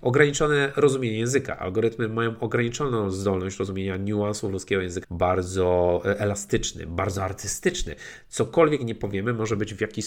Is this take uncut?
no; 1 cut; at 5.0 s

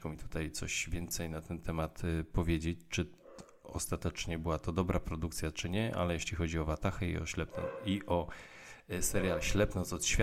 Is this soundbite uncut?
yes; 0 cuts

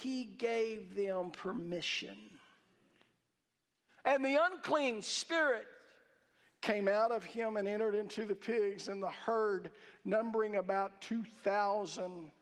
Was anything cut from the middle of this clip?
no; 0 cuts

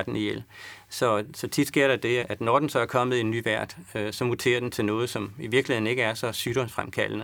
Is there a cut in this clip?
yes; 1 cut; at 2.2 s

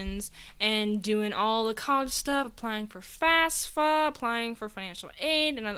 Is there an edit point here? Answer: no; 0 cuts

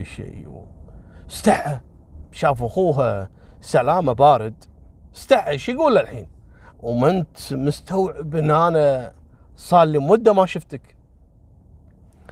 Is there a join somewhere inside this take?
yes; 1 cut; at 6.7 s

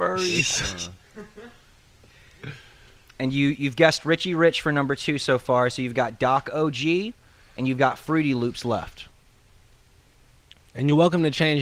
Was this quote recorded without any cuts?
yes; 0 cuts

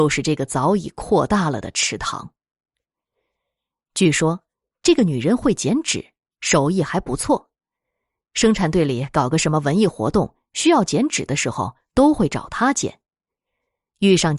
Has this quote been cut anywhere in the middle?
no; 0 cuts

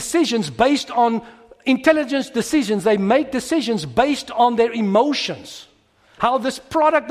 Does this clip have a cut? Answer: yes; 1 cut; at 6.2 s

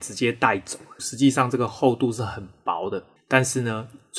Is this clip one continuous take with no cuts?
no; 2 cuts; at 1.0 s, 3.2 s

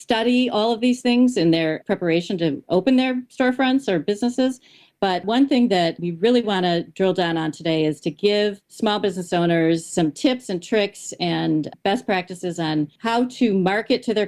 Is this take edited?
no; 0 cuts

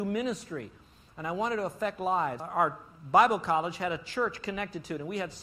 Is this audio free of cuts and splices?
yes; 0 cuts

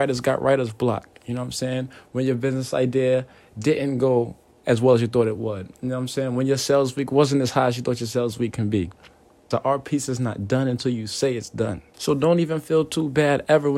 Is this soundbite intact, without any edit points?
no; 2 cuts; at 9.5 s, 11.9 s

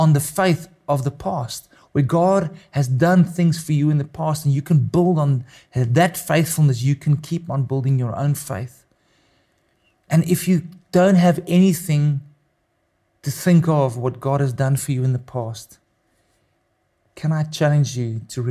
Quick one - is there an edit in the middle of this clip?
no; 0 cuts

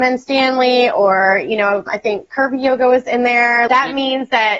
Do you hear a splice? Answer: yes; 2 cuts; at 1.9 s, 3.7 s

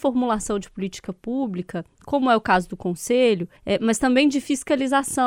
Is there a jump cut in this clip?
yes; 1 cut; at 3.6 s

